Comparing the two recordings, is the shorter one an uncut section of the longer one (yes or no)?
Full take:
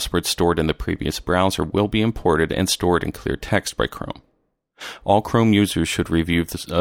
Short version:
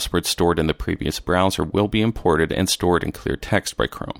yes